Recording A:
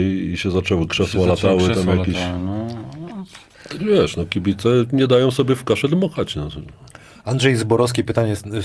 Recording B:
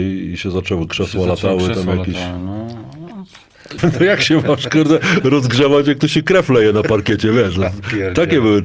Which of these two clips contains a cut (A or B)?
B